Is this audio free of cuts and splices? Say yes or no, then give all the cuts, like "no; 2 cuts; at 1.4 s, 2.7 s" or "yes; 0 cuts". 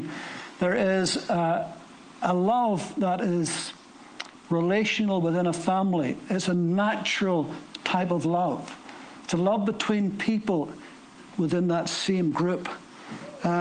yes; 0 cuts